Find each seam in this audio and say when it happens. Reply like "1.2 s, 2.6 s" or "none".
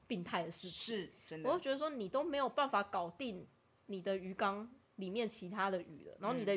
none